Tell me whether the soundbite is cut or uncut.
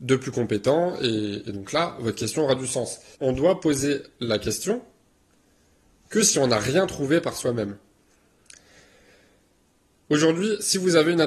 cut